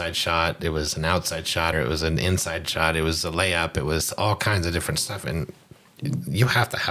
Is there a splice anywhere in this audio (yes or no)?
yes